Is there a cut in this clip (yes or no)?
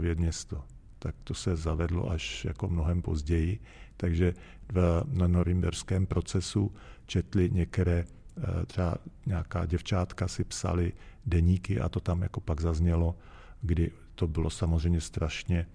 no